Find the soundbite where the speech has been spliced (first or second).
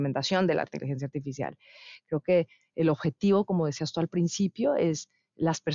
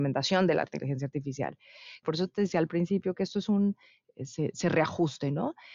second